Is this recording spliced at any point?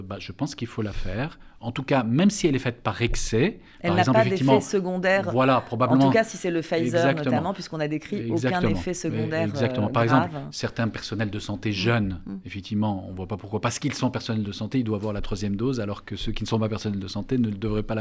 no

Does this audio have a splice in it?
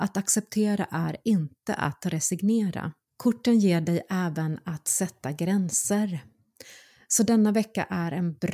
yes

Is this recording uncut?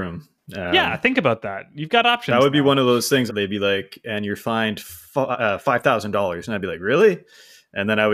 no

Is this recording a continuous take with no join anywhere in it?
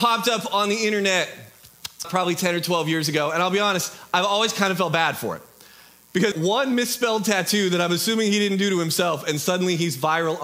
no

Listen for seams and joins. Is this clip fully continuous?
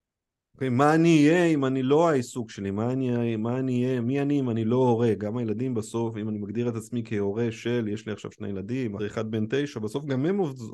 no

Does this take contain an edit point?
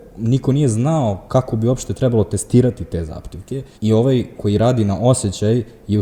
yes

